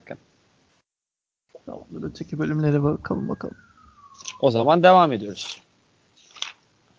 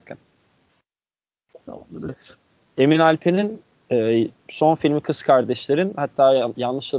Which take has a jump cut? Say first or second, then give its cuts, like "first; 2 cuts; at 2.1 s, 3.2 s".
second; 1 cut; at 2.1 s